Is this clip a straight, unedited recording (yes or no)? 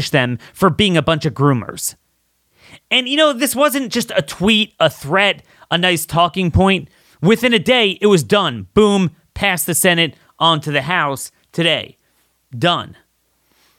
yes